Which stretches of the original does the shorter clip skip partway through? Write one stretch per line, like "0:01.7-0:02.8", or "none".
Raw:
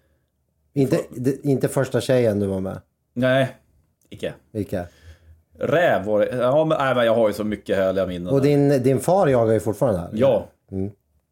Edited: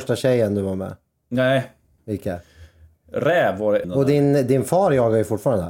0:03.8-0:04.4
0:06.3-0:08.2